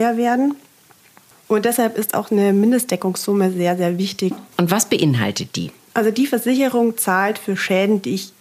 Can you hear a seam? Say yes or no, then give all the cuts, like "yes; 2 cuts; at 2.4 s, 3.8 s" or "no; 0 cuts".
yes; 2 cuts; at 1.3 s, 4.3 s